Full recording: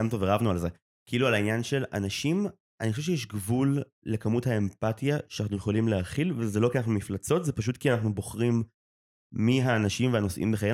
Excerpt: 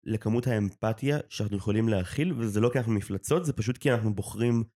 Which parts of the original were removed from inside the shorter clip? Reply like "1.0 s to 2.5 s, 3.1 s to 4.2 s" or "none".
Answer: none